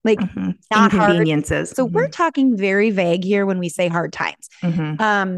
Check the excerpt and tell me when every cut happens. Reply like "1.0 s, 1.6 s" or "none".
1.7 s